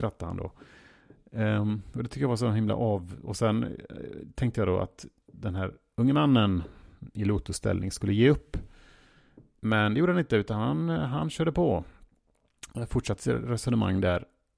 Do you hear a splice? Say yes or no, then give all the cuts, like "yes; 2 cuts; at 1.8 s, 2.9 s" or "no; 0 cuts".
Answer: no; 0 cuts